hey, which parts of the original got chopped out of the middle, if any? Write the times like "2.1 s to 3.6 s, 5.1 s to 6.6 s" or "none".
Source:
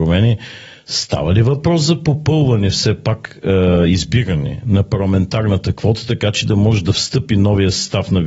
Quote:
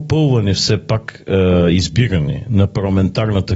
none